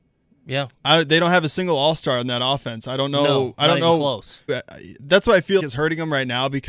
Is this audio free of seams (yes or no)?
no